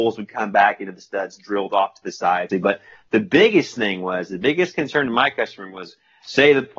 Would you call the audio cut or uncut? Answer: cut